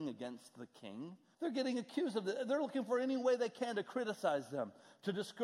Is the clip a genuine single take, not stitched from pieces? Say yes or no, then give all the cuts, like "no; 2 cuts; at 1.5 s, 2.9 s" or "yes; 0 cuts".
no; 1 cut; at 1.3 s